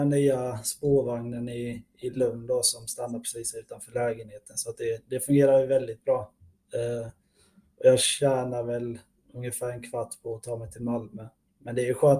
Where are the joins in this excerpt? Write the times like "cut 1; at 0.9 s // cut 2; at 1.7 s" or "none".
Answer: none